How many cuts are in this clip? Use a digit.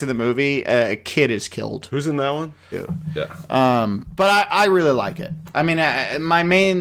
2